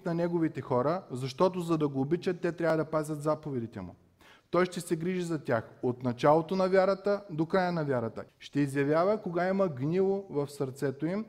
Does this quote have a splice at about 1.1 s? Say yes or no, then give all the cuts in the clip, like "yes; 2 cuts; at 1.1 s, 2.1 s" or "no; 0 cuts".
no; 2 cuts; at 4.4 s, 8.3 s